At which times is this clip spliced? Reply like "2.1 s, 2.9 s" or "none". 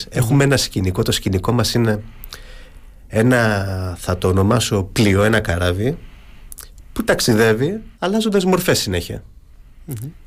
7.9 s